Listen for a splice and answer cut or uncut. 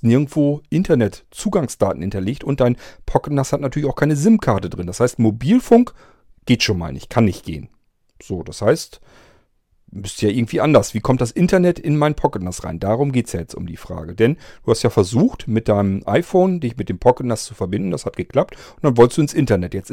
uncut